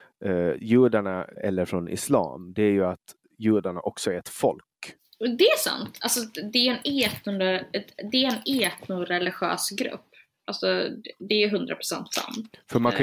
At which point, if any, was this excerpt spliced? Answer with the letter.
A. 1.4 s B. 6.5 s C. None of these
A